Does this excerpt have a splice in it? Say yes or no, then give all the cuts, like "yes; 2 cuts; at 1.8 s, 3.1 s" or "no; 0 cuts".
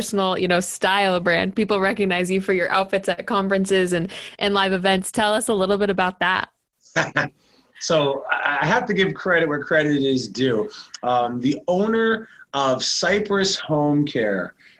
no; 0 cuts